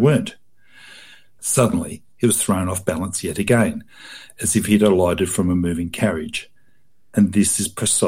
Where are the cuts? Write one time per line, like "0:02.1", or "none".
0:01.4